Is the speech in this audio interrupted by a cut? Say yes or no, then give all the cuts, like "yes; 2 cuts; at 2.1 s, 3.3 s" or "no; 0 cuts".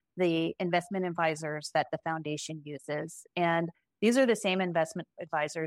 no; 0 cuts